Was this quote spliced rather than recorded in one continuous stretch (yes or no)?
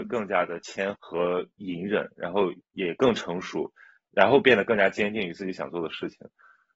yes